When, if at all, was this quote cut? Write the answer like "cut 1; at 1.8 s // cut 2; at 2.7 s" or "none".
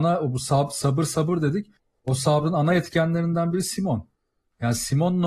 none

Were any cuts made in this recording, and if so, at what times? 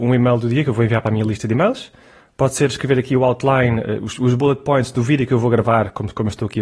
none

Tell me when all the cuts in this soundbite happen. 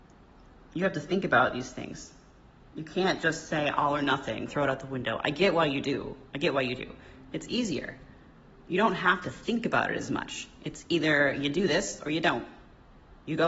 cut 1; at 4.5 s

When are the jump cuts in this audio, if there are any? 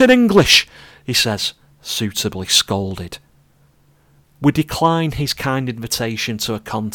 none

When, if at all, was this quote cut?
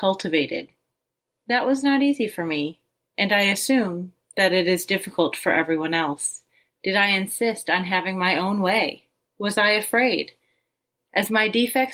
cut 1; at 6.7 s

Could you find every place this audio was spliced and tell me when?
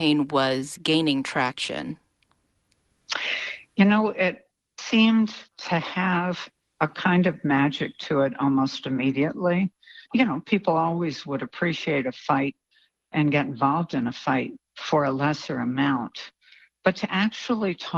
cut 1; at 10.1 s // cut 2; at 13.1 s // cut 3; at 14.7 s

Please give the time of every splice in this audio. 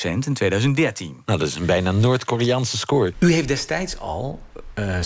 cut 1; at 3.1 s

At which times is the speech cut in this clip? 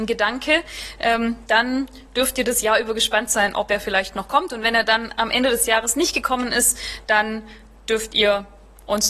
none

